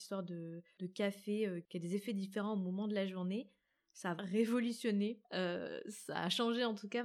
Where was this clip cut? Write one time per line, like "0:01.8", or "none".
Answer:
0:04.2
0:05.2